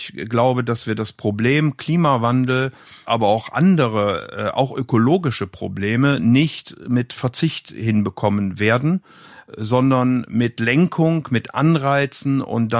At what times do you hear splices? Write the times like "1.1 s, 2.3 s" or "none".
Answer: none

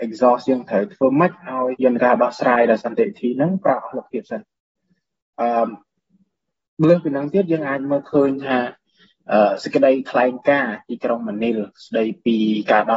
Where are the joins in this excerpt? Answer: 1.7 s

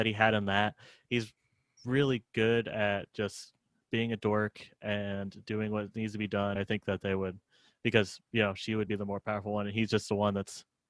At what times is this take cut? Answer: 6.6 s, 8.9 s

